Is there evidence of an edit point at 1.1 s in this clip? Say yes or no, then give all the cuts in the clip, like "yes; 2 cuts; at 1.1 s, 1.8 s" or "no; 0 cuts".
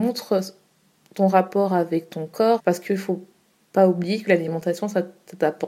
no; 1 cut; at 2.6 s